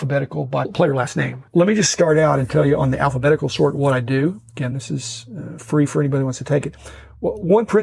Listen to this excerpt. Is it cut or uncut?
uncut